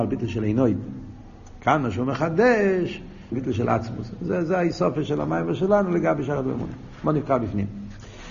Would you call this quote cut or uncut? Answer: cut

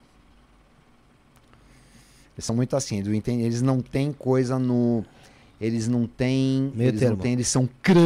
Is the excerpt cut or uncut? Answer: uncut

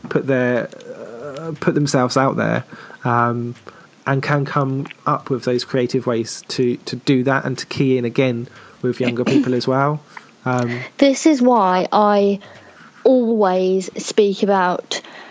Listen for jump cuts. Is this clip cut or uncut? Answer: uncut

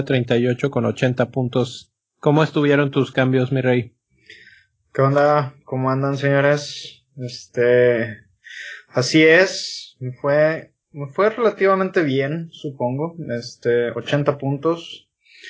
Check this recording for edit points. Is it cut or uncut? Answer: cut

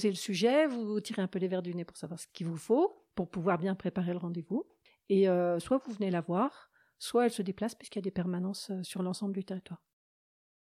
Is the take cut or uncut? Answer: uncut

